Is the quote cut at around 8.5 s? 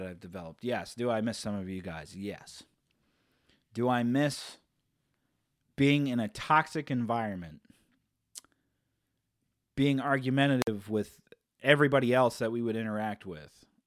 no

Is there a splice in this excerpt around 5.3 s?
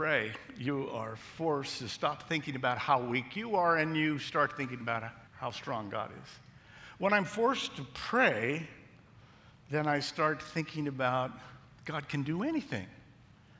yes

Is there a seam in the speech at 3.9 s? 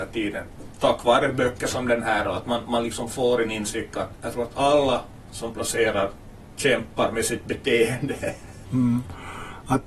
yes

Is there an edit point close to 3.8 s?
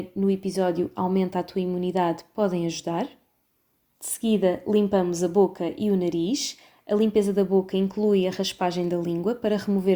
yes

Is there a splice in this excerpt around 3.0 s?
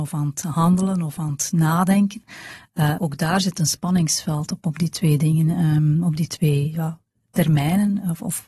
yes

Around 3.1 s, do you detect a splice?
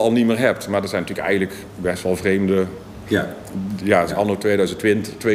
yes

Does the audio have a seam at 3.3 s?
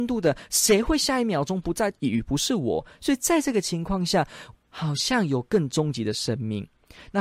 no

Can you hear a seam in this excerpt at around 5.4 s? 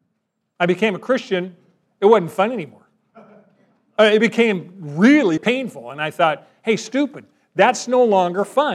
yes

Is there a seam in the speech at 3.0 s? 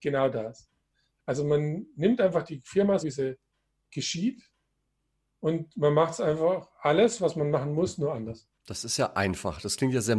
yes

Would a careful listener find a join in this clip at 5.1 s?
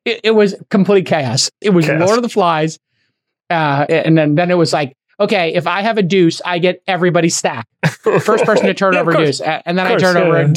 no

